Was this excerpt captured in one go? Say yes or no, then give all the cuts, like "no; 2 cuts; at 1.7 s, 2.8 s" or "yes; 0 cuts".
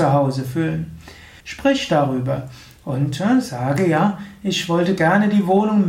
no; 1 cut; at 1.4 s